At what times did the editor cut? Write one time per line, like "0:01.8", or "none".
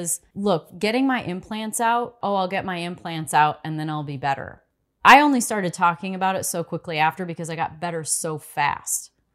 0:02.2